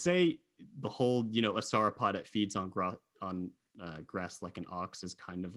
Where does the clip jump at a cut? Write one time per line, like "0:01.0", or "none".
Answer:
none